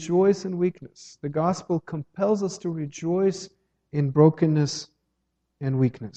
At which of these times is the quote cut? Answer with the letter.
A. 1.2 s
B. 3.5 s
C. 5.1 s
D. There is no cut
D